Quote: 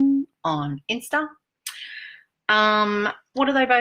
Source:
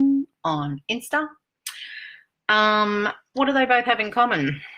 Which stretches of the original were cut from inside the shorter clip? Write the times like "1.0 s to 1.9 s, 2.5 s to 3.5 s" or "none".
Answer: none